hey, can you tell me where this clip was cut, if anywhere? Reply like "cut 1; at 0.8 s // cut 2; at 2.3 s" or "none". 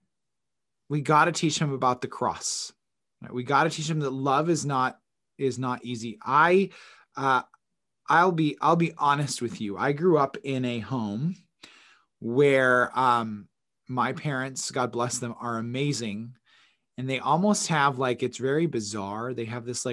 none

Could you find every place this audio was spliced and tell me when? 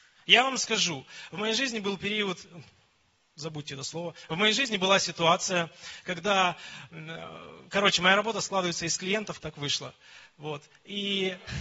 cut 1; at 7.7 s // cut 2; at 9.4 s

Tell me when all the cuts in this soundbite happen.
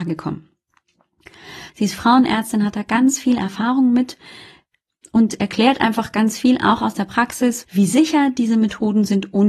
cut 1; at 1.7 s // cut 2; at 7.6 s

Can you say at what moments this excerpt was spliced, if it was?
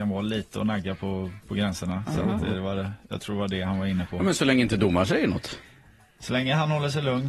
none

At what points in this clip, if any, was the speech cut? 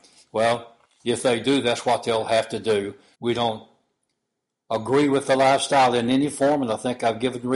cut 1; at 3.1 s

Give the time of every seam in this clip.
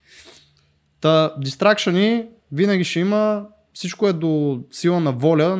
none

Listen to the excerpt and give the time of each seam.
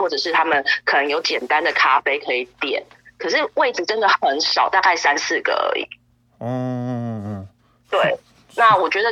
none

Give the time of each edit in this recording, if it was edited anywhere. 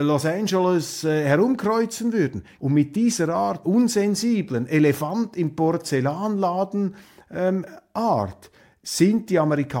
cut 1; at 2.6 s // cut 2; at 3.6 s

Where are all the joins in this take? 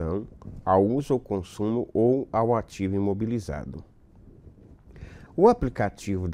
cut 1; at 5.3 s

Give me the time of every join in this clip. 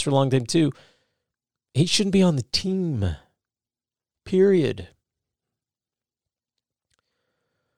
none

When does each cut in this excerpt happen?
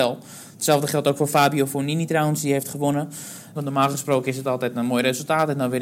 cut 1; at 3.5 s

